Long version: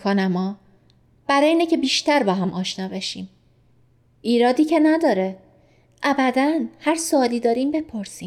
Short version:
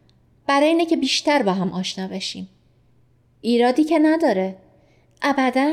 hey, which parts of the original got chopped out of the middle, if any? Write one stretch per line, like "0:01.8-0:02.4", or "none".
none